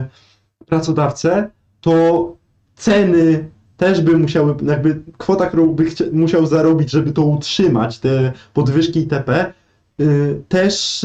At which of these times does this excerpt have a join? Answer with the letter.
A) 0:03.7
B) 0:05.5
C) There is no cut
A